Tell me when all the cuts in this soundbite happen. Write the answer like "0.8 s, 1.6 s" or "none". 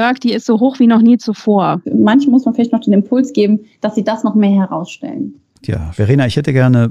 1.8 s